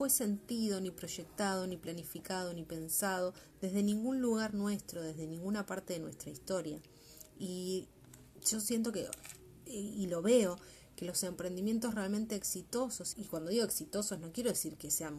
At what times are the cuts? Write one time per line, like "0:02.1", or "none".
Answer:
0:13.1